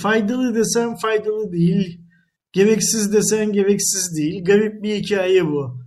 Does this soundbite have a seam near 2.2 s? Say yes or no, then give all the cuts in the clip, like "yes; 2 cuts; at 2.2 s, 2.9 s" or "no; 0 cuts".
no; 0 cuts